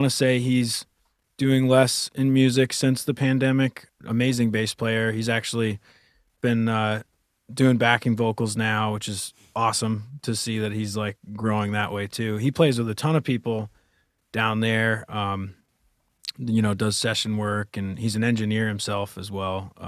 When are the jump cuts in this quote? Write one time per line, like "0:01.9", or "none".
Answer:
0:03.9